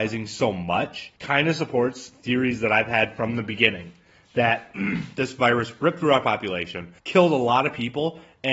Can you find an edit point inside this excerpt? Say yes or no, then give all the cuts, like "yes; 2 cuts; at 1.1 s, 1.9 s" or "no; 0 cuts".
yes; 2 cuts; at 1.2 s, 7.0 s